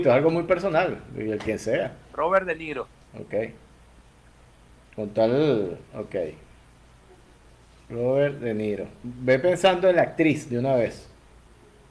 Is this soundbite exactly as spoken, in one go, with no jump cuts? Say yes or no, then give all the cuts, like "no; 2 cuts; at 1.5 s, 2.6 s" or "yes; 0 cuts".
yes; 0 cuts